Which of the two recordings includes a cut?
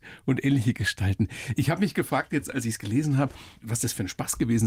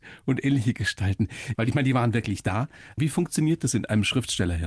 second; 2 cuts; at 1.5 s, 3.0 s

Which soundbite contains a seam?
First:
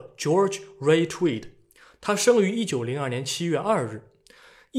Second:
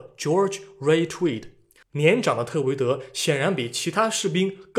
second; 1 cut; at 1.8 s

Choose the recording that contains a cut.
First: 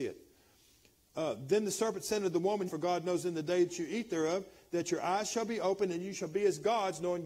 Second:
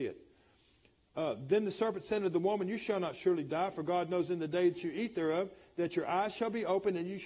first; 1 cut; at 2.7 s

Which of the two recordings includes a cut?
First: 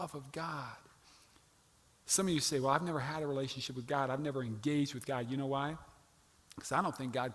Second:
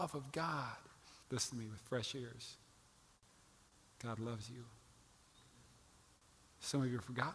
second; 1 cut; at 1.2 s

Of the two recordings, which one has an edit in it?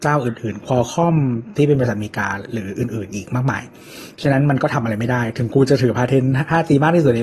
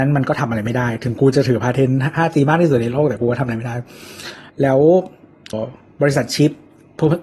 second; 2 cuts; at 4.5 s, 5.5 s

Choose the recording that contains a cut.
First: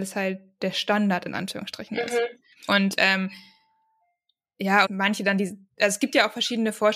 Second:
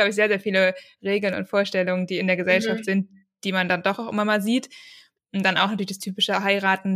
first; 2 cuts; at 2.7 s, 4.8 s

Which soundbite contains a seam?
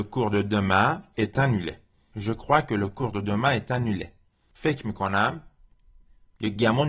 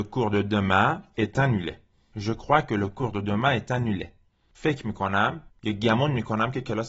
second; 1 cut; at 5.5 s

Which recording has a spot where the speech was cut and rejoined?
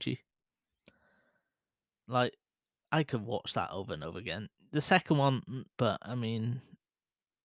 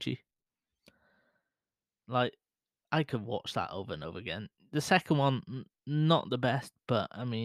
first; 1 cut; at 5.8 s

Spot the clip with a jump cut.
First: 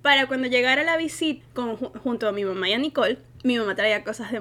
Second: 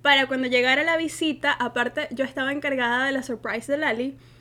first; 1 cut; at 1.4 s

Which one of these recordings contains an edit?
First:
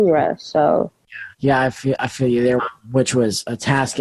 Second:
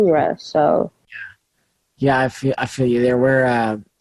first; 2 cuts; at 1.3 s, 2.6 s

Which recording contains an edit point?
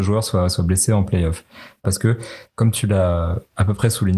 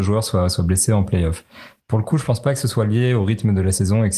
first; 1 cut; at 1.8 s

